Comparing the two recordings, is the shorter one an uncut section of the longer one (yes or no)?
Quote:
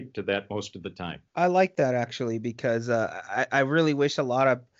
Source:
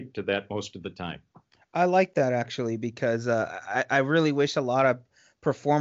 no